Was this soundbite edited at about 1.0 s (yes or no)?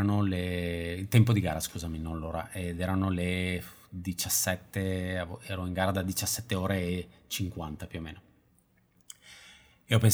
no